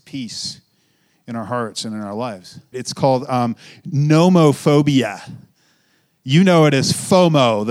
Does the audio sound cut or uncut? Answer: cut